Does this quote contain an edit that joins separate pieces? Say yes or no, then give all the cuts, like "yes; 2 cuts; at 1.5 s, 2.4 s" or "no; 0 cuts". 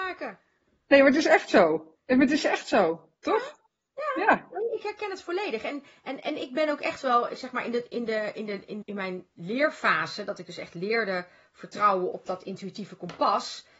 yes; 3 cuts; at 2.0 s, 8.8 s, 12.1 s